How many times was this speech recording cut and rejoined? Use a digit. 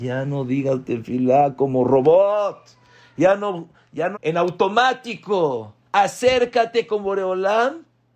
2